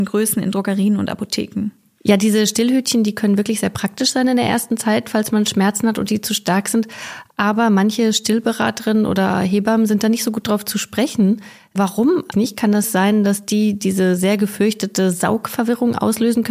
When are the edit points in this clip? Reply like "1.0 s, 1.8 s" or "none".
12.3 s